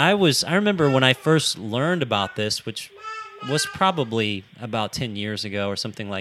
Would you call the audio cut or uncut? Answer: uncut